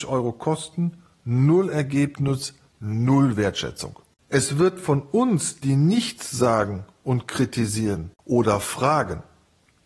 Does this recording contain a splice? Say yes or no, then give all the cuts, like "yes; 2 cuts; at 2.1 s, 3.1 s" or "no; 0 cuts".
yes; 1 cut; at 4.1 s